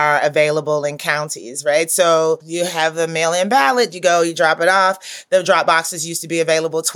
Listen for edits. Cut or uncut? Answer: uncut